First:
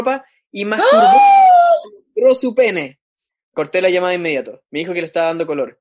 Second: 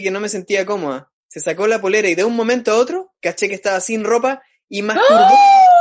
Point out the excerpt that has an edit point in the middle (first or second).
first